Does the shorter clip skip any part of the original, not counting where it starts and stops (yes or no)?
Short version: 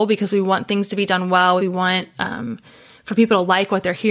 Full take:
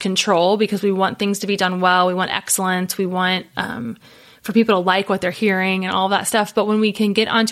yes